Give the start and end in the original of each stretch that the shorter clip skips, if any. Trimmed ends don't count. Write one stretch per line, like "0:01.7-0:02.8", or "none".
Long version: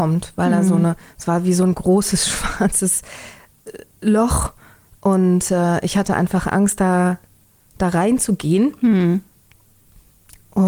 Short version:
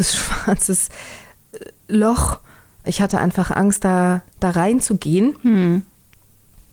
0:05.0-0:05.8
0:07.3-0:07.7